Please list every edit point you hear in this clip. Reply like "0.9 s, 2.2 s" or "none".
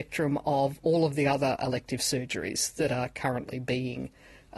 none